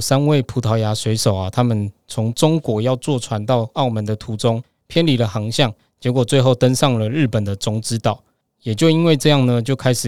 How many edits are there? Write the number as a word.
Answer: zero